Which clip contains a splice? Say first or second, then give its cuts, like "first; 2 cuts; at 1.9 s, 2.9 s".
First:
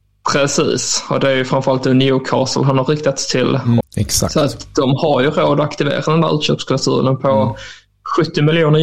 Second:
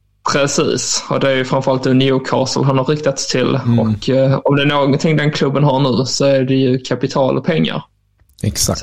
first; 1 cut; at 3.8 s